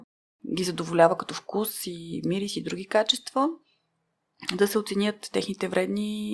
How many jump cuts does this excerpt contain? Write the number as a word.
zero